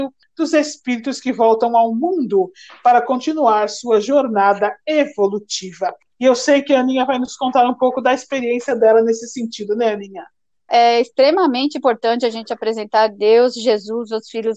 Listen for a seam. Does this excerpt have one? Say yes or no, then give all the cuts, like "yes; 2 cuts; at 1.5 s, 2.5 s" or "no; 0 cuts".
yes; 1 cut; at 10.7 s